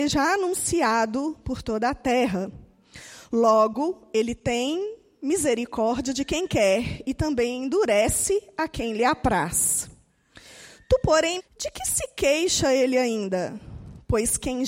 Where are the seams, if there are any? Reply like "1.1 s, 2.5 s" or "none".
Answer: 11.4 s